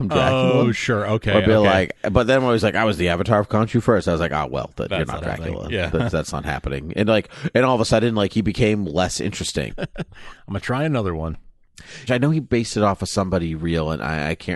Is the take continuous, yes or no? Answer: no